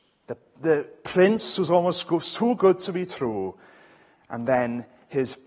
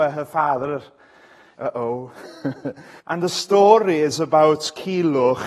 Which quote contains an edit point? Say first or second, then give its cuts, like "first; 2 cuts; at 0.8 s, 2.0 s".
second; 2 cuts; at 1.5 s, 3.0 s